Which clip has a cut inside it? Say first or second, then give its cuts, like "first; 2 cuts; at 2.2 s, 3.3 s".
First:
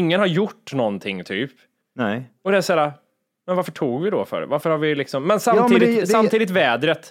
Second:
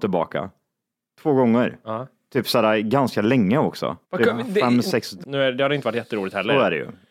second; 2 cuts; at 4.0 s, 5.2 s